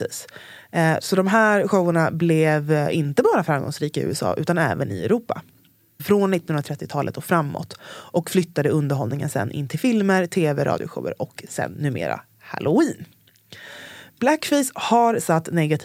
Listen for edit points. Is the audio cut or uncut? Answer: cut